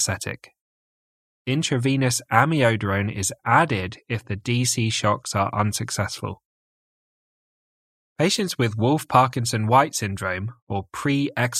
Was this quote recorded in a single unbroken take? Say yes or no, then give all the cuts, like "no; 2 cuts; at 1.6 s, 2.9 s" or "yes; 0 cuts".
yes; 0 cuts